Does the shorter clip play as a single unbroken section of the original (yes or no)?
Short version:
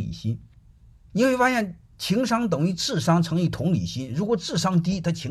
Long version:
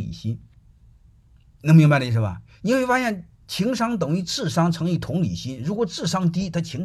no